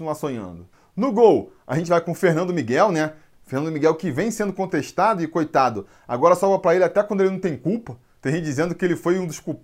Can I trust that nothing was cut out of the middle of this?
yes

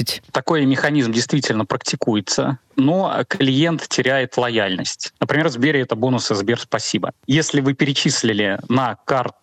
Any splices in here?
yes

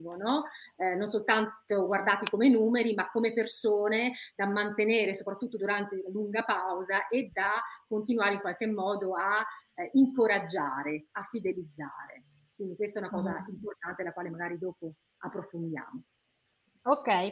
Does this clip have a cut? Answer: no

